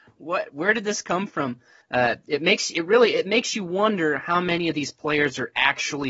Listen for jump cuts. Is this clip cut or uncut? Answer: cut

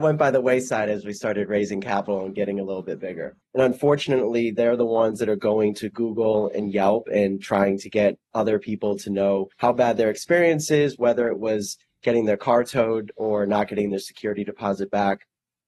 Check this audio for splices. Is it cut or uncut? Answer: cut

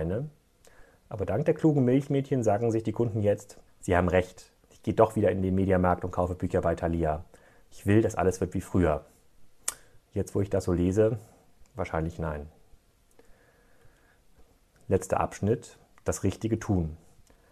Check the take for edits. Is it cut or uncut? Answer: cut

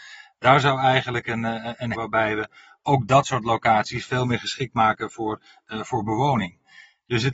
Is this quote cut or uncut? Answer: cut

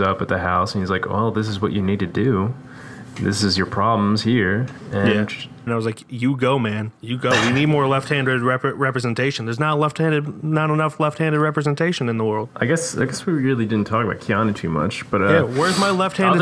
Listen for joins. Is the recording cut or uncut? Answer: cut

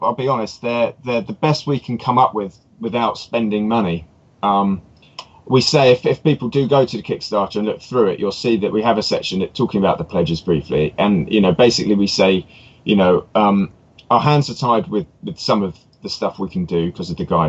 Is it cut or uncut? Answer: uncut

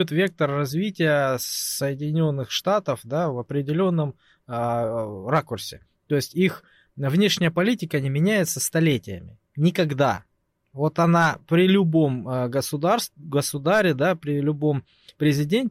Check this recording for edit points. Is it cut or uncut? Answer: uncut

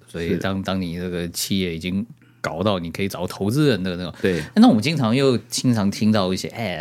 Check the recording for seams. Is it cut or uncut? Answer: uncut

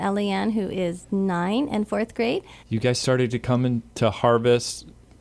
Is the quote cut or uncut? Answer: cut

